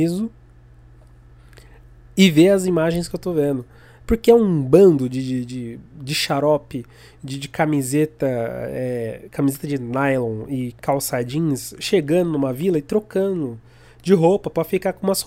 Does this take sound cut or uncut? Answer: uncut